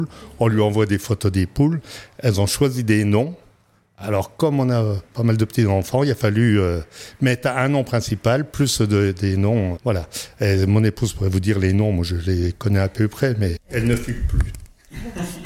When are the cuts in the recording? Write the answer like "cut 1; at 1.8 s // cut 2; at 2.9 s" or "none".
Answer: cut 1; at 9.8 s // cut 2; at 13.6 s